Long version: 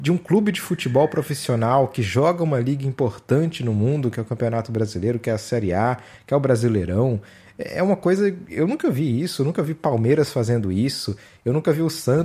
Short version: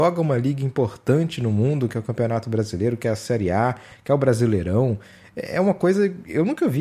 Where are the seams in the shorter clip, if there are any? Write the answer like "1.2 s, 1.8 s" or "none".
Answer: none